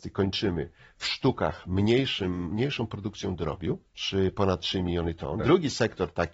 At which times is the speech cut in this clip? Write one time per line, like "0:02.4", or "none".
0:03.9
0:05.4